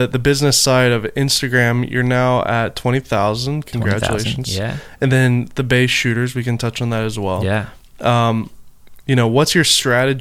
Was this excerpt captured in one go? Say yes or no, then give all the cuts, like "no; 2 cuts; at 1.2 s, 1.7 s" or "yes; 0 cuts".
yes; 0 cuts